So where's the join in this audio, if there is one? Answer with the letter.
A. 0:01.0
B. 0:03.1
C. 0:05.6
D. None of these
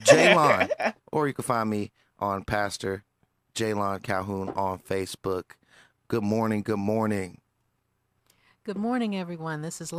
A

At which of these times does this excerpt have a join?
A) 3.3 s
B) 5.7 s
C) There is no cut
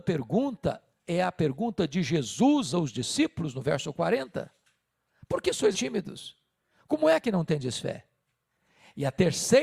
B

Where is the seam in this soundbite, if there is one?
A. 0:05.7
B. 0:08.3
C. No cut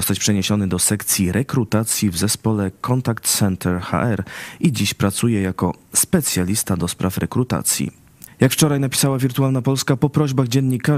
B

